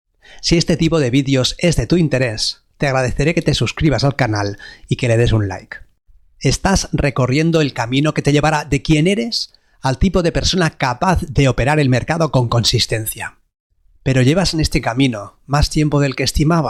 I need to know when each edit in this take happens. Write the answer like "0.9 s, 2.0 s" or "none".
none

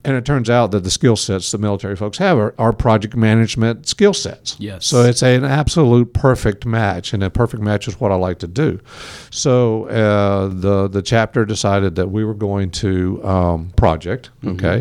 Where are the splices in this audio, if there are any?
13.7 s

